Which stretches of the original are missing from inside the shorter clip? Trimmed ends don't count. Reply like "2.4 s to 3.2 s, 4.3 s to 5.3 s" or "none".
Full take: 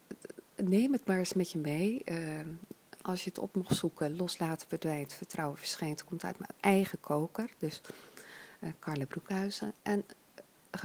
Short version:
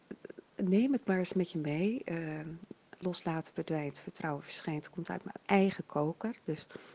3.0 s to 4.2 s